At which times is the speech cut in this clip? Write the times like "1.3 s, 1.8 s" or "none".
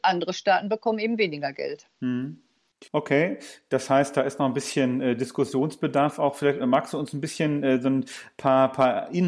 2.9 s